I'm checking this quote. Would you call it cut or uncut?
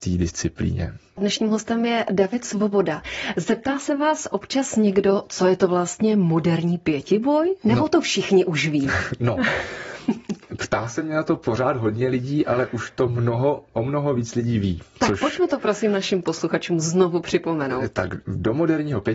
cut